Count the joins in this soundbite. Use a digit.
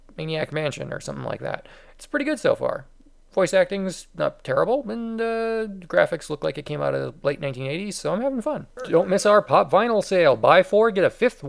1